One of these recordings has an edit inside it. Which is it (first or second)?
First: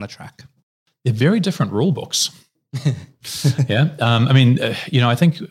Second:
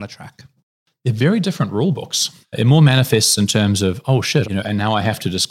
second